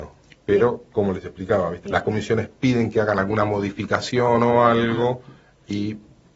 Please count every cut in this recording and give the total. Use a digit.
1